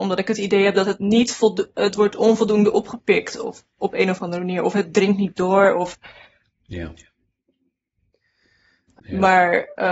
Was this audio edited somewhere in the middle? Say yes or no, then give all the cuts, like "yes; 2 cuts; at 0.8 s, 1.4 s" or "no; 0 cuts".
yes; 1 cut; at 9.0 s